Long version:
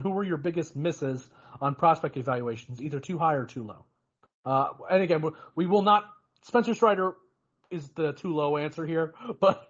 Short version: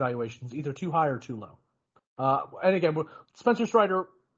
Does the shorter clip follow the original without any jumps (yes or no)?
no